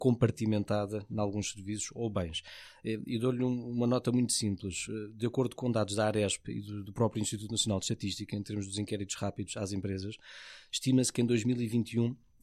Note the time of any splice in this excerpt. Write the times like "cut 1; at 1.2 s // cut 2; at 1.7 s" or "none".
cut 1; at 6.9 s